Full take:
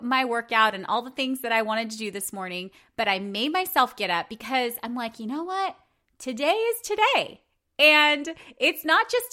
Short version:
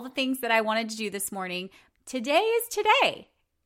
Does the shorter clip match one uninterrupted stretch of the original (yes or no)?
no